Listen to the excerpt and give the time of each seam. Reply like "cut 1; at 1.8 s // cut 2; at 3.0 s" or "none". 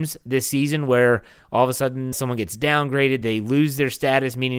cut 1; at 2.1 s // cut 2; at 3.2 s